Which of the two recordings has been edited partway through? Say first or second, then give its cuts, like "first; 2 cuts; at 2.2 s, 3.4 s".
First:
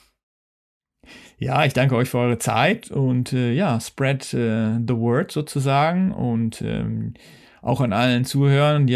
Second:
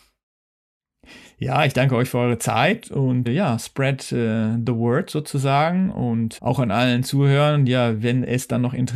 second; 2 cuts; at 3.3 s, 6.4 s